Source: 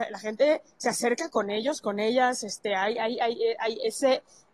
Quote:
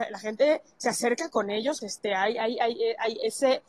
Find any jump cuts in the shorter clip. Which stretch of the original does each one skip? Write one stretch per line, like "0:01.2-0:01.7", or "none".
0:01.8-0:02.4